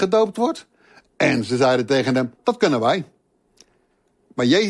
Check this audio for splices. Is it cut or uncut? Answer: cut